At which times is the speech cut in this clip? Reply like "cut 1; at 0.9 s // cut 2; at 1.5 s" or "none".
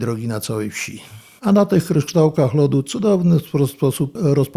cut 1; at 1.4 s